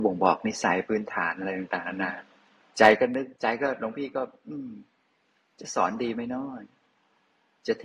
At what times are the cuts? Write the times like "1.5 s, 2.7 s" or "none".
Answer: 3.4 s

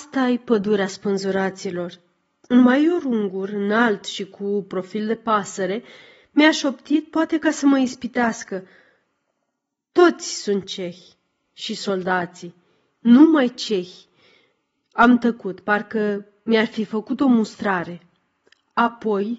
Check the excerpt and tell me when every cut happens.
11.4 s

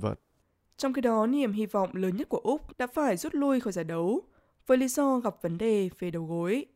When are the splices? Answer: 2.7 s

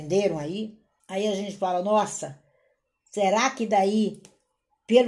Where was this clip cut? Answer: 1.0 s

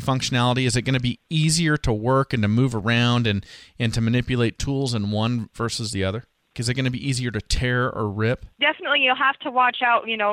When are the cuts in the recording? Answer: 6.5 s, 8.6 s

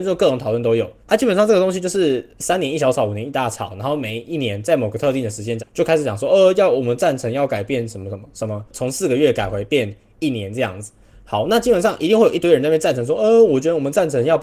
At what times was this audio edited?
1.0 s, 5.6 s

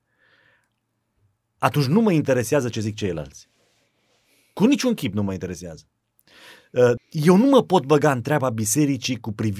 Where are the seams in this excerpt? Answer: 7.0 s

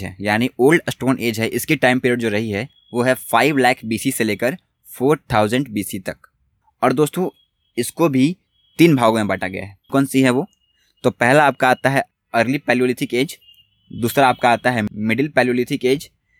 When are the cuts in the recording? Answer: 9.9 s

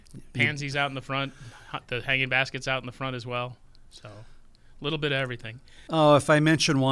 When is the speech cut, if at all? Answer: 5.9 s

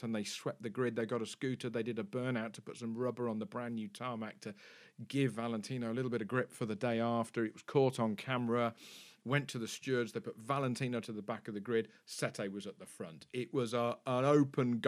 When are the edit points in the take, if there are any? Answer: none

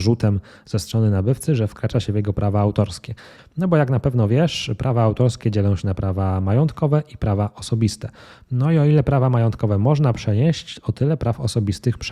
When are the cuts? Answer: 3.4 s

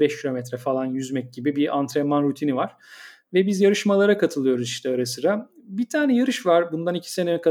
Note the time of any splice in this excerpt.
none

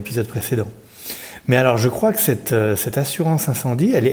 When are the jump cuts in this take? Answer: none

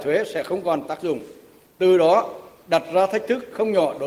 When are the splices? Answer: none

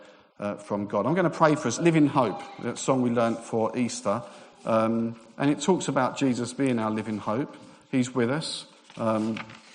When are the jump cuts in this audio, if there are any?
1.8 s

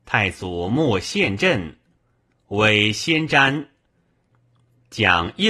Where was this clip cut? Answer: none

